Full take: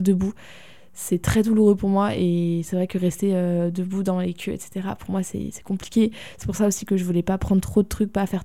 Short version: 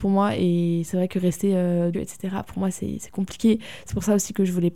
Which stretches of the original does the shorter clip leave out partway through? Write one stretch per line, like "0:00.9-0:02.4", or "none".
0:03.7-0:04.5